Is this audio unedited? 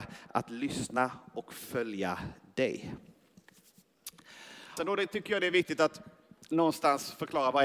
no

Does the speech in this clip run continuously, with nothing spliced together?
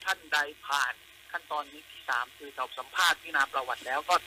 yes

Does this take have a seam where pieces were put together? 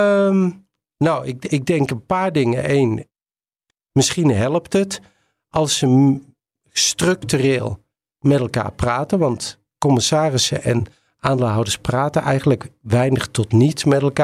no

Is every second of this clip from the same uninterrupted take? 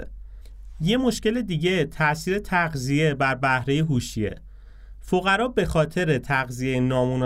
yes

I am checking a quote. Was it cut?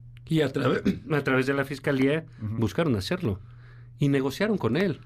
no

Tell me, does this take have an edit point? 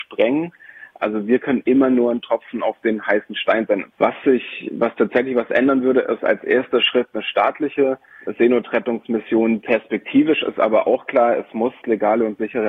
yes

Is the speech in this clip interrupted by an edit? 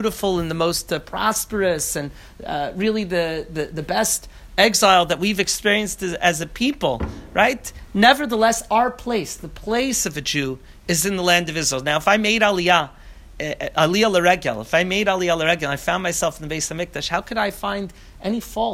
no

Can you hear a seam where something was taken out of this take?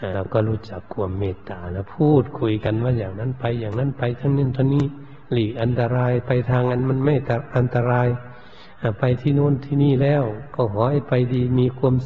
no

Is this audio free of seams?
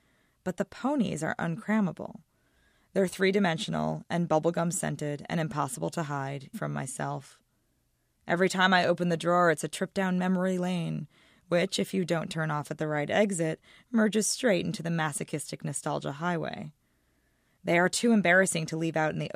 no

